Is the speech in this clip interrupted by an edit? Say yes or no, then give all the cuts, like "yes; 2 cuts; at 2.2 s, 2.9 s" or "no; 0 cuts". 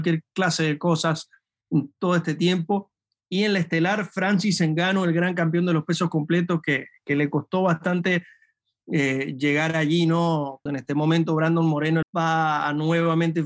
yes; 2 cuts; at 10.7 s, 12.0 s